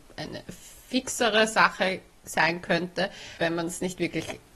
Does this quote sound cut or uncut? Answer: cut